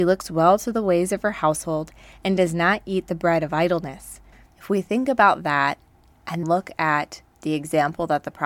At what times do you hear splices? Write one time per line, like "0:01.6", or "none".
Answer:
0:04.5
0:06.4